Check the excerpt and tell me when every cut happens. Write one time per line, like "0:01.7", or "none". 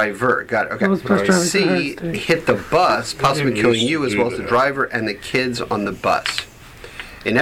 none